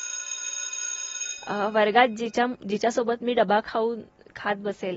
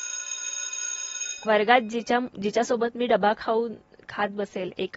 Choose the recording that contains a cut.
second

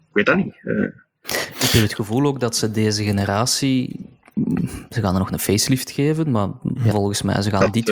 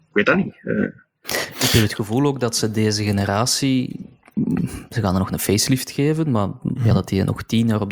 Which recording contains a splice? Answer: first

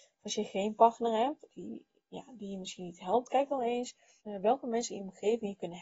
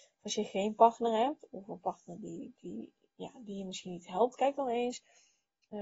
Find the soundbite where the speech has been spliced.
first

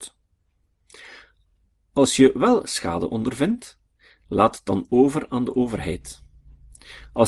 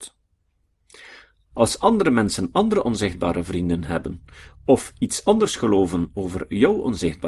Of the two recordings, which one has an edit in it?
second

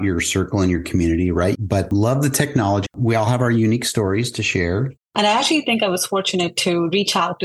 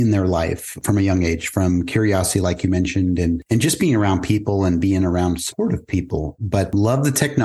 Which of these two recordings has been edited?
first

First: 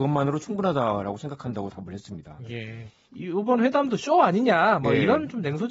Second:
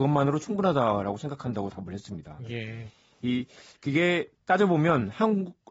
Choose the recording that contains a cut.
first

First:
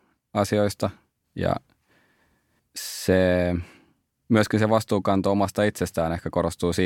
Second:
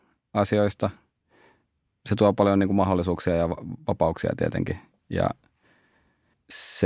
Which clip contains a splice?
first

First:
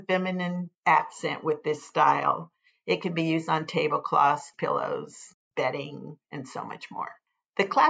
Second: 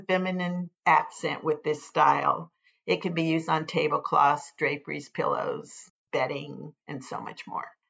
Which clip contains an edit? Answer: first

